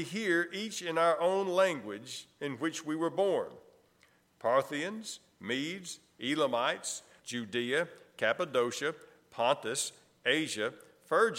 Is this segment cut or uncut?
cut